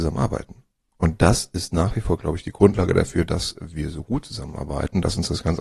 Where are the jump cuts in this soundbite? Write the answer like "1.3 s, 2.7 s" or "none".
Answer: 0.9 s